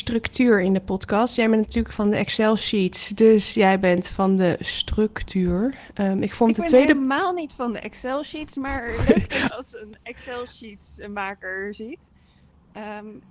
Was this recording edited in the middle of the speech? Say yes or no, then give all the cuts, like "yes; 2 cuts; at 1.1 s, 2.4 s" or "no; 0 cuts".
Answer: yes; 1 cut; at 9.5 s